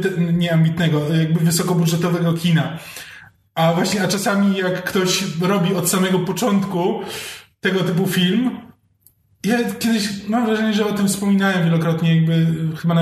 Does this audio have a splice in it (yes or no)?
no